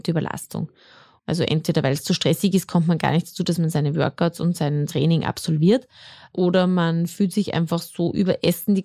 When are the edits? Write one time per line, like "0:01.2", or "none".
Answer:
0:01.2